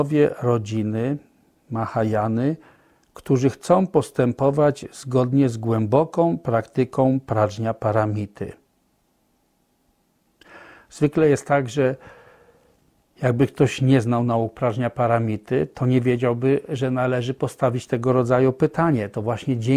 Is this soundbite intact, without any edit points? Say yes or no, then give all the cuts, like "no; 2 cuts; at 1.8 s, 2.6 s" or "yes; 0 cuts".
yes; 0 cuts